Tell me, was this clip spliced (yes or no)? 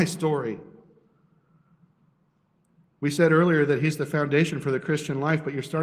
no